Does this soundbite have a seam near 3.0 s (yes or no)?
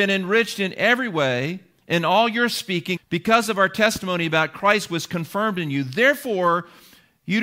yes